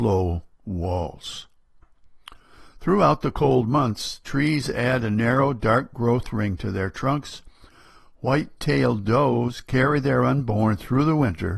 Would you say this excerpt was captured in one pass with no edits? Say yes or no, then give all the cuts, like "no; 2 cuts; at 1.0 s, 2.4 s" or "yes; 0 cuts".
yes; 0 cuts